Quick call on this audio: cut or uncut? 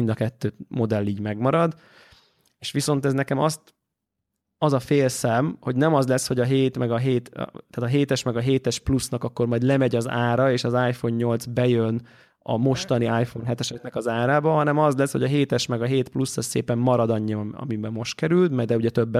uncut